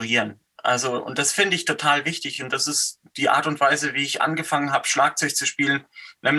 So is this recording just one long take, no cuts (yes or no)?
yes